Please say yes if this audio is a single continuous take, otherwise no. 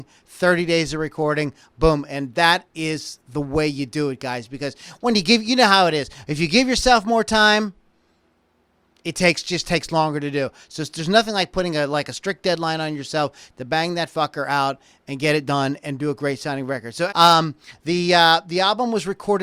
no